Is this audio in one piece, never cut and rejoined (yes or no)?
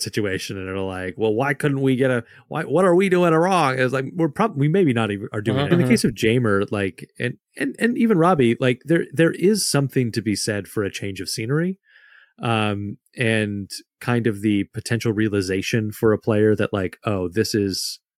no